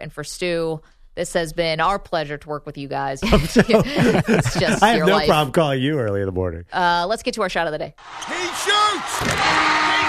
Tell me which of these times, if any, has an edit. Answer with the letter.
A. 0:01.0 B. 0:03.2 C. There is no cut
B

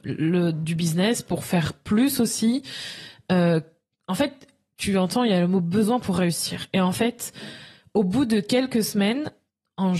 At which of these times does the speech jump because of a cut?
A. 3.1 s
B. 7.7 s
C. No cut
C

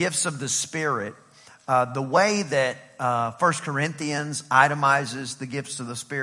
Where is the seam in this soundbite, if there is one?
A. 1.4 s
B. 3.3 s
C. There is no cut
C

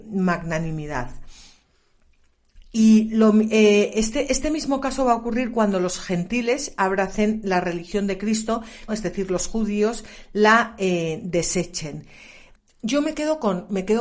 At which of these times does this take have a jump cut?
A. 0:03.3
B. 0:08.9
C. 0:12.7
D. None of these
B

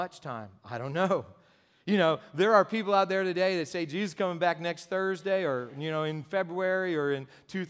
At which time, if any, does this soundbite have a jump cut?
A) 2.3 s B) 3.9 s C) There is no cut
C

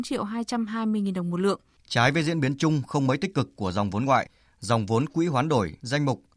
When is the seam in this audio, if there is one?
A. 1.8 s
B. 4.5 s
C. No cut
A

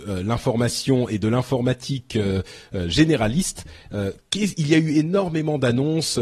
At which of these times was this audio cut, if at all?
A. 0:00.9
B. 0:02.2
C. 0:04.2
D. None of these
C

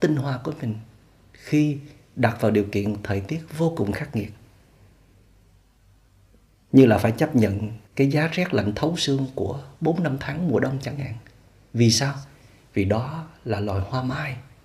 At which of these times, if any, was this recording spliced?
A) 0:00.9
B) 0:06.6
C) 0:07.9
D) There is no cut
C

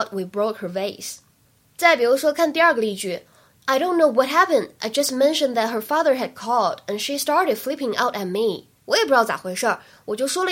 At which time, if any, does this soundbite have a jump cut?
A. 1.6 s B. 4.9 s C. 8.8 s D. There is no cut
C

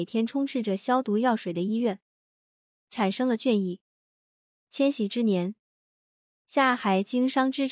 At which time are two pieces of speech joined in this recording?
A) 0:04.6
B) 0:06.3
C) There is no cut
C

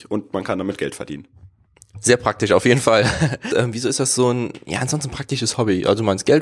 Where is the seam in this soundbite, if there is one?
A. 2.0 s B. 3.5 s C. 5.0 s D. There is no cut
B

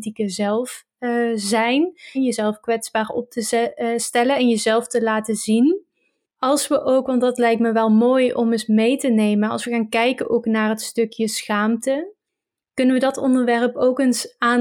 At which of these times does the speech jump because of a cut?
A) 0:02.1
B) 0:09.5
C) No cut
A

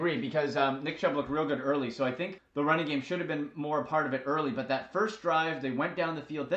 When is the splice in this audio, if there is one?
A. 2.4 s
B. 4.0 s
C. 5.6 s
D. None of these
A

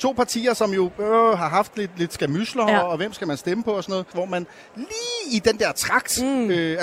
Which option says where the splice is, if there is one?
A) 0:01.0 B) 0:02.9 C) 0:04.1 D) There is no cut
C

